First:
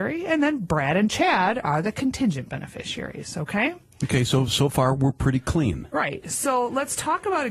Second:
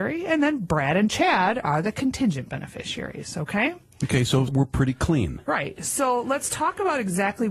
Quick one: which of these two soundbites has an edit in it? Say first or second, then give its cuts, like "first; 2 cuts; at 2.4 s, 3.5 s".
second; 1 cut; at 4.5 s